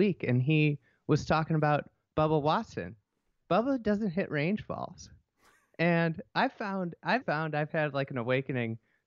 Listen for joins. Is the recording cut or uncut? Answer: cut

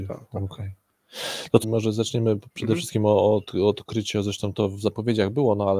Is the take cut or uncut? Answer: cut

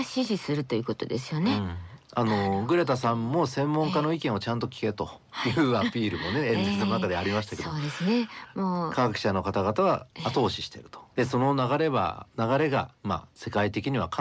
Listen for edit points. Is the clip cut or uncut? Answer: uncut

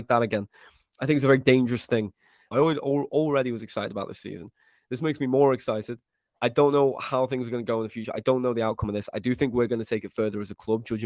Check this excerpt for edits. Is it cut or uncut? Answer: cut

